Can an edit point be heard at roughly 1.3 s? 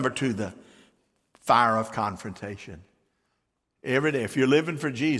no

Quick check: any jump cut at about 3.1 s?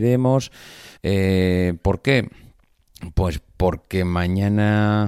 no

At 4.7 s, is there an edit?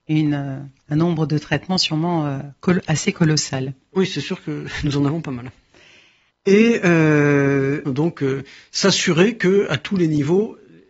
no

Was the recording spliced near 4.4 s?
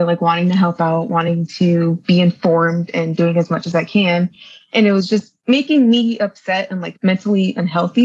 no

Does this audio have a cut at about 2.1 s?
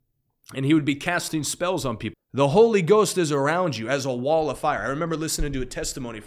yes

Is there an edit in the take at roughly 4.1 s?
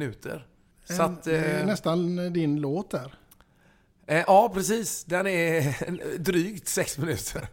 no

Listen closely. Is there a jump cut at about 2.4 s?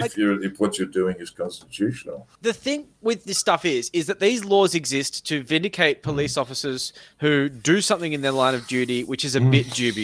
yes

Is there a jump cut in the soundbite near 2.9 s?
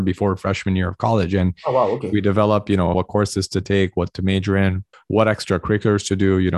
yes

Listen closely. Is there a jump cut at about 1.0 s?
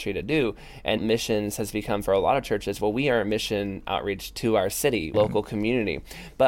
yes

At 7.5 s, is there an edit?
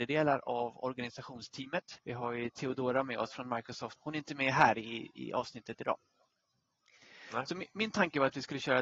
no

